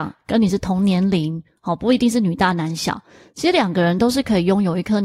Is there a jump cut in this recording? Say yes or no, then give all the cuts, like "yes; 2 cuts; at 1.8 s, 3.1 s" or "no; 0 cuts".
no; 0 cuts